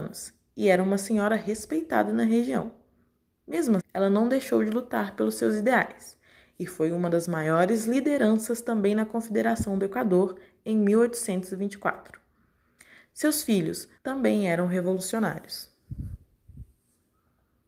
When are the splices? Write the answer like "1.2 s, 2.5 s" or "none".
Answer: 3.8 s, 14.0 s

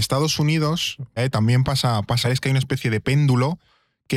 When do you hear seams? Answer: 1.2 s, 2.2 s

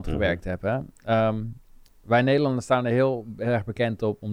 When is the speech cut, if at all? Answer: none

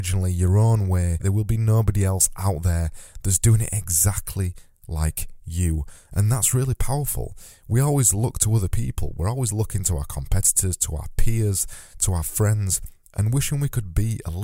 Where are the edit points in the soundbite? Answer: 1.2 s

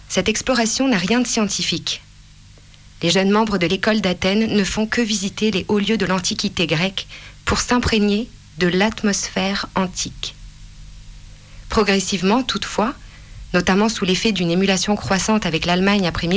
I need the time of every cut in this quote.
none

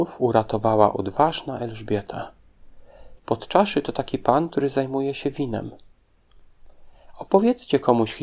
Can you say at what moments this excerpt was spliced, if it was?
3.2 s

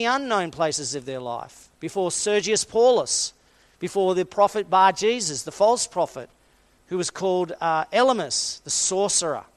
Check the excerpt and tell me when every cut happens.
none

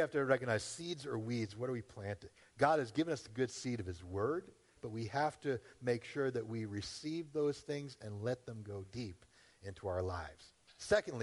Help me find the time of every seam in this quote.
4.8 s

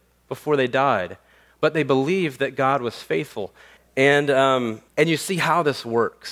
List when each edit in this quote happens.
3.8 s, 4.9 s

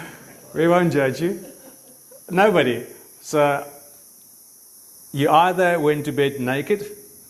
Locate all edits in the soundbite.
none

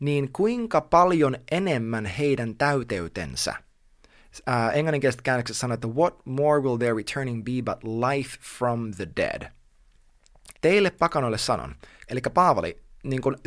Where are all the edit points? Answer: 10.5 s, 12.1 s

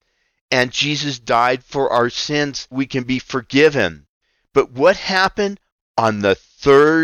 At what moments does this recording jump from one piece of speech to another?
2.7 s

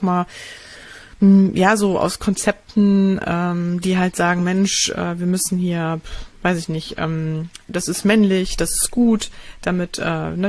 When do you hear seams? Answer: none

